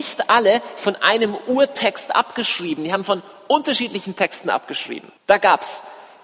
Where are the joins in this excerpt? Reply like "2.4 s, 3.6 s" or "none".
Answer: 5.2 s